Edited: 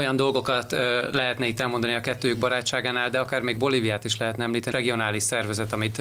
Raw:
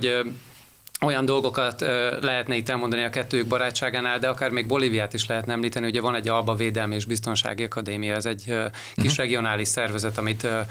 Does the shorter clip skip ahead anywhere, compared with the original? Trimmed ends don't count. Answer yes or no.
yes